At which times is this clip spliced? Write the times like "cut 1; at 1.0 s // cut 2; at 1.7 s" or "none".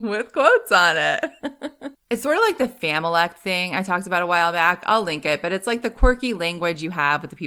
cut 1; at 1.9 s